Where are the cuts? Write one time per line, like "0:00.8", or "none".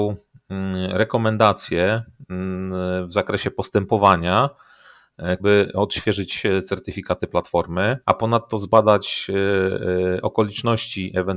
0:05.4
0:08.0

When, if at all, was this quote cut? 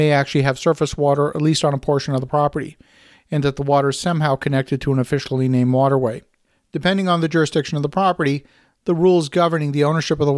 none

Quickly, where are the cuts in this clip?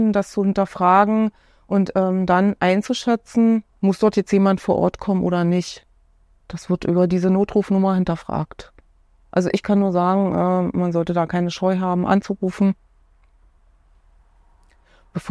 0:03.7

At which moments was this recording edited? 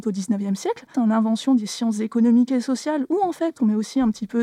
0:00.9

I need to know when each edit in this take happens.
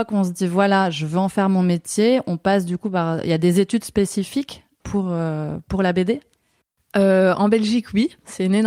none

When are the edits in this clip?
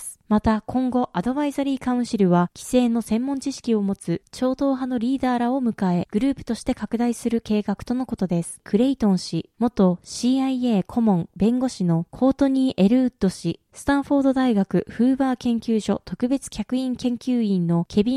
0:08.6

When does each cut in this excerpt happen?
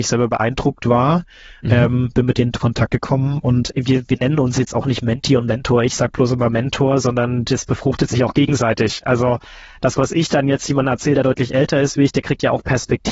none

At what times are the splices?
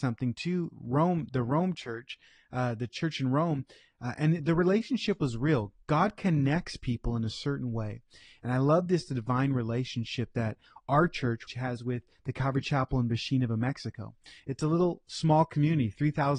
0:11.5

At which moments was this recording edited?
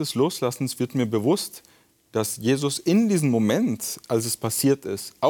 none

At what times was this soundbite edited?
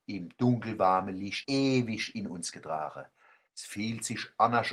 0:01.4
0:03.5

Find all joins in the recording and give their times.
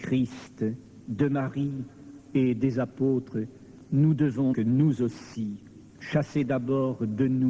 0:04.5
0:05.9

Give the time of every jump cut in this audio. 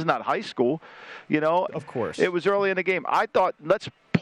0:01.7

